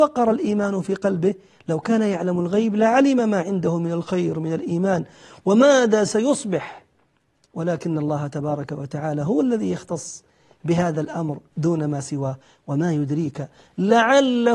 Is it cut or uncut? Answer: uncut